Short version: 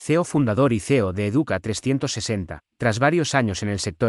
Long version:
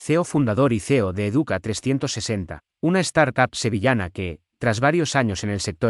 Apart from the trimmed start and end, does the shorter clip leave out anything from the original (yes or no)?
yes